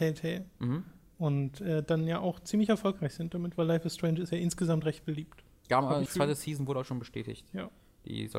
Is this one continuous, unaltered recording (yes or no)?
no